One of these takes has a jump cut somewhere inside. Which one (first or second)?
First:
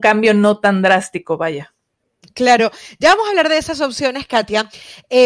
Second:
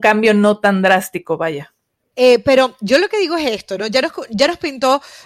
second